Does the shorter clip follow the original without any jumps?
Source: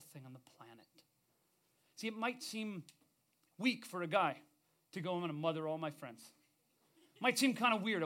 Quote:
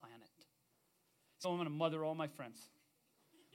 no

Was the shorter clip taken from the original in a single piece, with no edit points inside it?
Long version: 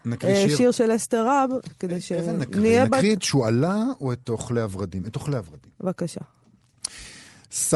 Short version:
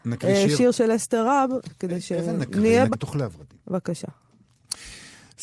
no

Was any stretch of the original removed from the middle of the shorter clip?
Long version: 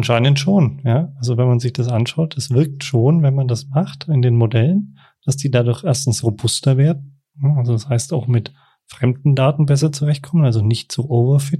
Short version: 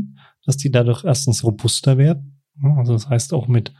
no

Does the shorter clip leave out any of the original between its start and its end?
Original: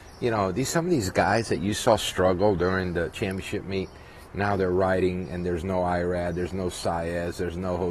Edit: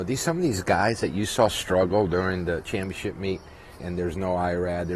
yes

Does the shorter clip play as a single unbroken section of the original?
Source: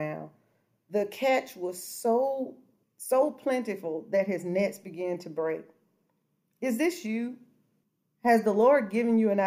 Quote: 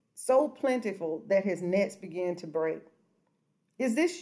yes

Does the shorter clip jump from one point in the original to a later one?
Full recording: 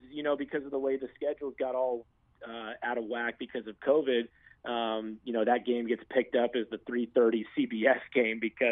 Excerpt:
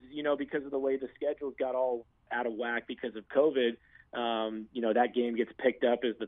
yes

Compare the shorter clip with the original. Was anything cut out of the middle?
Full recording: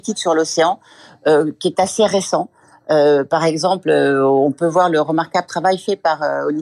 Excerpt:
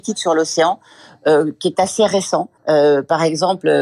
yes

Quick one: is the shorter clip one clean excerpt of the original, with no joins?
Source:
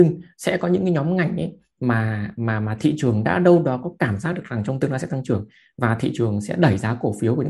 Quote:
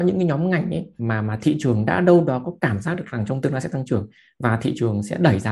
no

